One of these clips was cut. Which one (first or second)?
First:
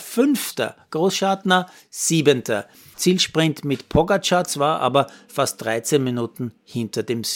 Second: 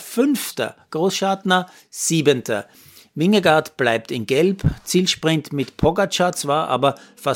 first